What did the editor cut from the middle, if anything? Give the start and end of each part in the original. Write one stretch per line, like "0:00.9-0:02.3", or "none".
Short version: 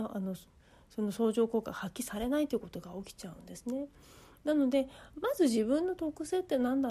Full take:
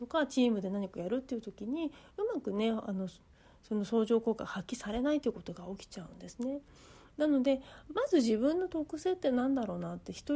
none